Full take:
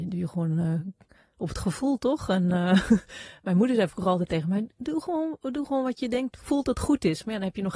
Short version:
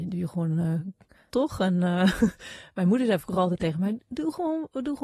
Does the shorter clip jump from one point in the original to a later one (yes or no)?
yes